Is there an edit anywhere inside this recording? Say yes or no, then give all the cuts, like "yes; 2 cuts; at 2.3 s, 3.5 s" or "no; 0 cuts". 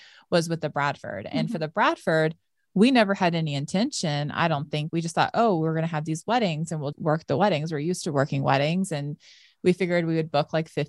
yes; 2 cuts; at 4.9 s, 6.9 s